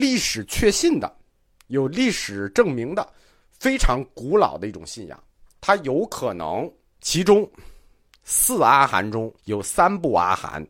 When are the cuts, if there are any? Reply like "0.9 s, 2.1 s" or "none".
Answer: 7.0 s, 9.4 s